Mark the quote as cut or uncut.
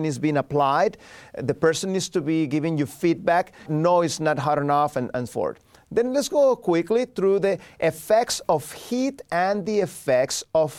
cut